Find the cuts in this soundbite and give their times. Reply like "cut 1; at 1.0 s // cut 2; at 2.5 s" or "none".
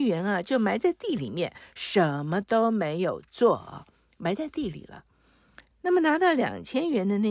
cut 1; at 5.7 s